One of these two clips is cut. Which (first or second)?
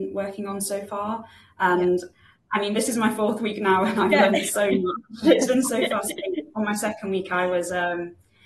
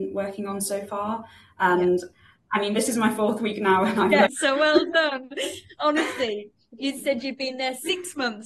second